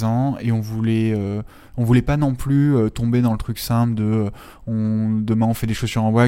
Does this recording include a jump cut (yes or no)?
no